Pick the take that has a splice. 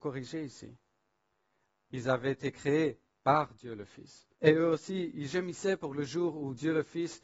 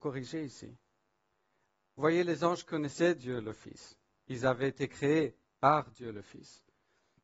first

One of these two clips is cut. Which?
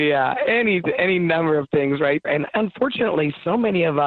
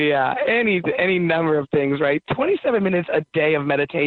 first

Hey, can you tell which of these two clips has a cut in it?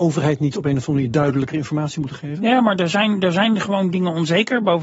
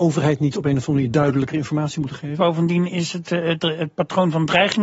second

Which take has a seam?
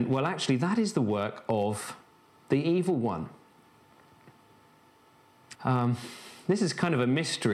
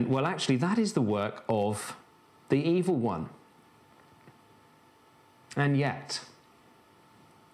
first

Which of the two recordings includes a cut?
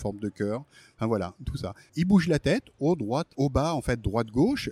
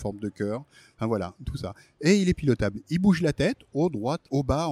first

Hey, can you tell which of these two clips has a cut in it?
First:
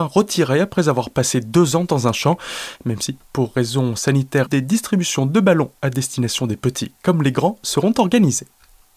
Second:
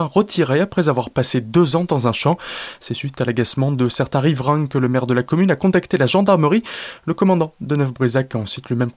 first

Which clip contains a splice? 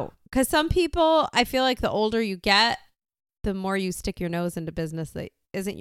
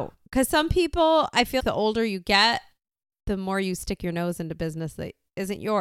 second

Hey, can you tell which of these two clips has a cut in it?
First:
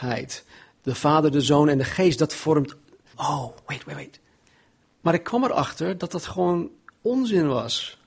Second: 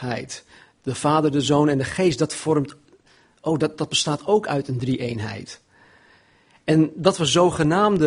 first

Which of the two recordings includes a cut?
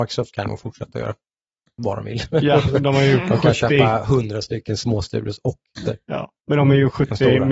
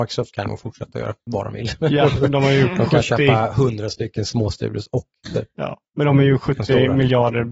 second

